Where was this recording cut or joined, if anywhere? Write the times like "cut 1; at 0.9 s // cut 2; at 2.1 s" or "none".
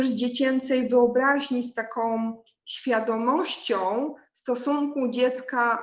none